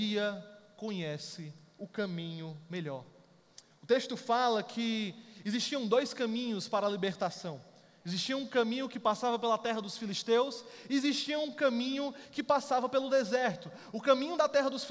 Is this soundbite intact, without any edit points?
yes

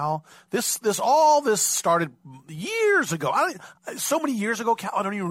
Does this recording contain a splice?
no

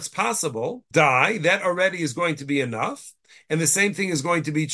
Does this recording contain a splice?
yes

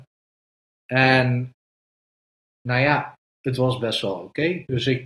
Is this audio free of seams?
yes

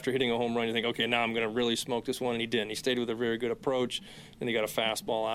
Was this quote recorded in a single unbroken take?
yes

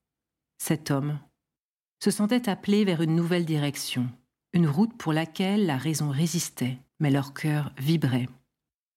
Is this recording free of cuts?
no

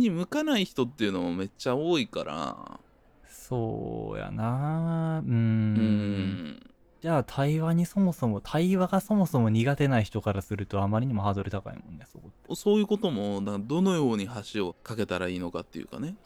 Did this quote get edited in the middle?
yes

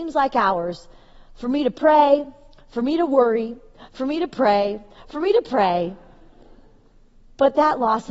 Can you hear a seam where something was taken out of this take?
yes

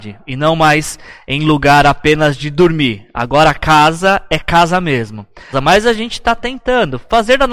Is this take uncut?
no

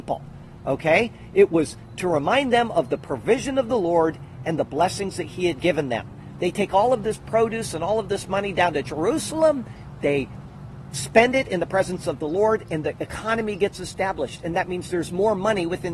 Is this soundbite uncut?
yes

